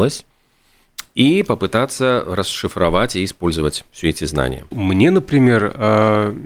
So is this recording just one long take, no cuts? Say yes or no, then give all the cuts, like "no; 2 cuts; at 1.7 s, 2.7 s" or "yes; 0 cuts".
no; 1 cut; at 4.7 s